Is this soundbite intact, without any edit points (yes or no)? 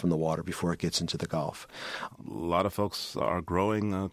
no